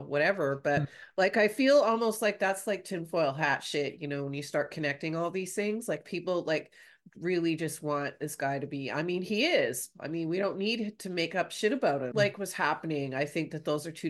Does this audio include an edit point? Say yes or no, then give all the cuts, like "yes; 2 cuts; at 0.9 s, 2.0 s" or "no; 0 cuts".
yes; 1 cut; at 12.1 s